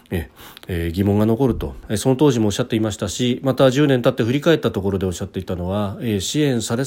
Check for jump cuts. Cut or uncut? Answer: uncut